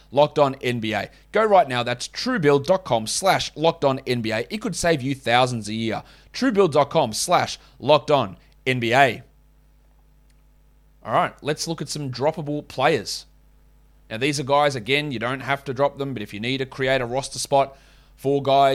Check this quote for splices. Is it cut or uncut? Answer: uncut